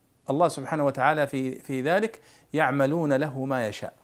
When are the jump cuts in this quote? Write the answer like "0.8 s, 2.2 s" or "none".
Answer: none